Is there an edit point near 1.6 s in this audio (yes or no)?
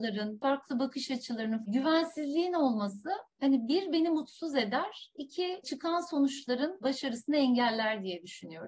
yes